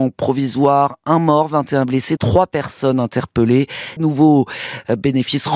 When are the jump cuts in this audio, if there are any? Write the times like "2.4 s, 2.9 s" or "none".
2.2 s, 4.0 s